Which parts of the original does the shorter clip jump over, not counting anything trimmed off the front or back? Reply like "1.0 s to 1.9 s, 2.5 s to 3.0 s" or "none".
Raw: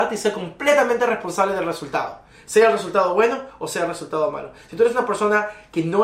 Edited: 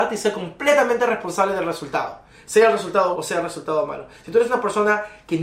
3.1 s to 3.6 s